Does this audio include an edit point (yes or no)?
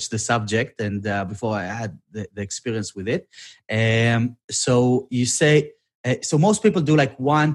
no